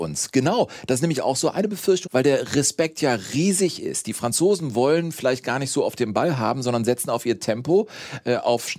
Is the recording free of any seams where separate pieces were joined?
no; 1 cut; at 2.1 s

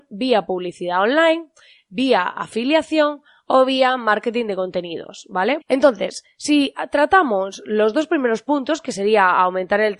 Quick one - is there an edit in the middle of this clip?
yes; 1 cut; at 5.6 s

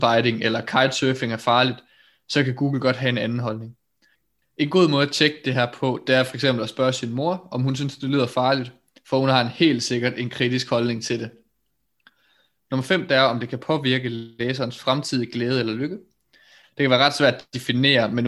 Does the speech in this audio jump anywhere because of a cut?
no; 0 cuts

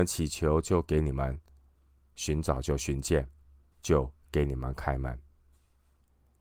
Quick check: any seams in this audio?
yes; 1 cut; at 3.7 s

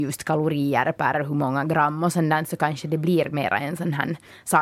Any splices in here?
no; 0 cuts

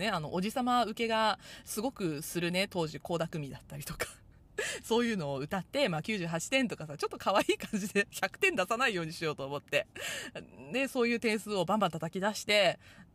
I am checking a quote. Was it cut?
yes; 1 cut; at 6.0 s

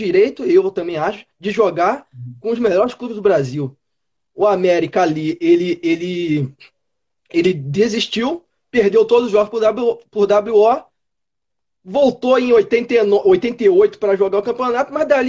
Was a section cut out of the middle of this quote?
no; 0 cuts

